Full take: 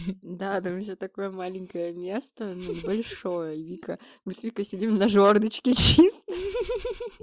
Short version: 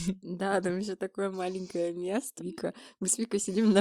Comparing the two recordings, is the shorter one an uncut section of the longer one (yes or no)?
no